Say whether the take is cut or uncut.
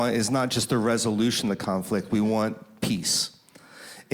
uncut